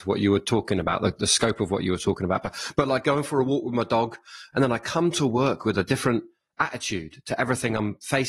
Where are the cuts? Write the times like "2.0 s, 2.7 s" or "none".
4.5 s